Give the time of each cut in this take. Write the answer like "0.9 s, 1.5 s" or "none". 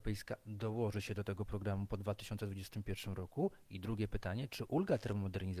none